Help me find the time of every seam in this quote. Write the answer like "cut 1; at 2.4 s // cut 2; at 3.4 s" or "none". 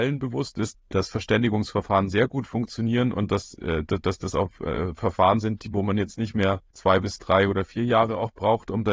none

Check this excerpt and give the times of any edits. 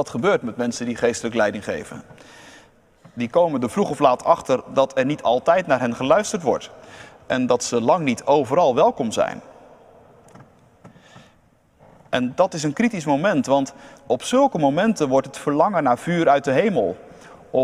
cut 1; at 14.0 s

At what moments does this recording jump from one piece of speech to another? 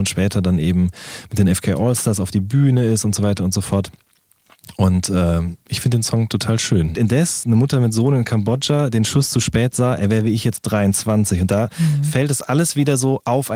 cut 1; at 6.9 s

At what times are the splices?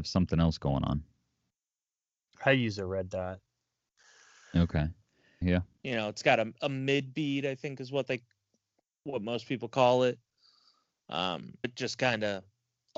cut 1; at 5.4 s // cut 2; at 11.6 s

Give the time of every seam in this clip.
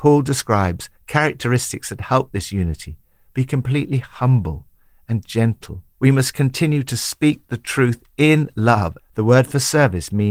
cut 1; at 5.9 s // cut 2; at 9.0 s

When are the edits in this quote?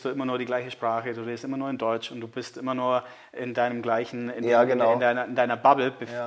none

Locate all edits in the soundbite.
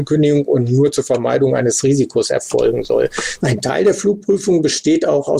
cut 1; at 3.4 s

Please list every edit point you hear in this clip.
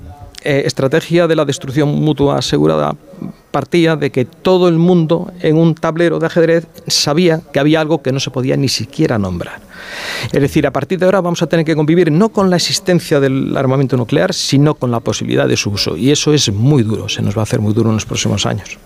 cut 1; at 10.3 s

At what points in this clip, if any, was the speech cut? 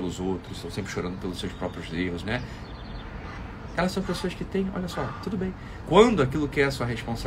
cut 1; at 2.2 s // cut 2; at 5.8 s

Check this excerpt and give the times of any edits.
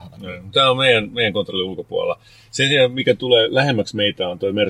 none

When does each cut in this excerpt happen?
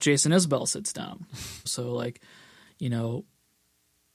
cut 1; at 1.7 s

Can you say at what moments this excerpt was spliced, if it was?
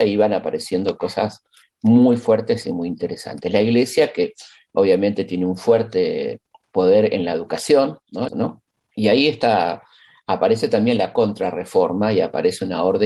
cut 1; at 8.3 s

